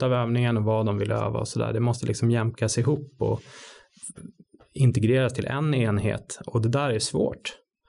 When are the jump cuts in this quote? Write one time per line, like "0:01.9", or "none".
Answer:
none